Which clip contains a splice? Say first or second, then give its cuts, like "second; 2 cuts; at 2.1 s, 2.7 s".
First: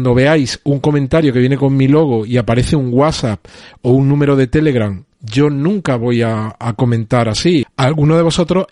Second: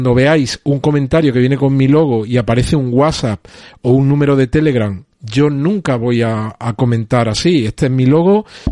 first; 1 cut; at 7.6 s